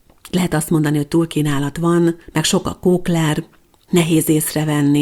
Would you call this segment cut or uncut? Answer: cut